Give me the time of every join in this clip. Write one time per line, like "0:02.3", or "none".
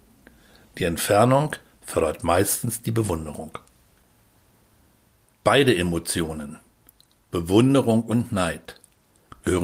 none